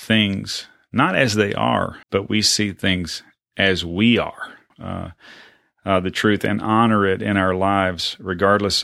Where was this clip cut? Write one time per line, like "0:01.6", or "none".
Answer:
0:02.0
0:04.7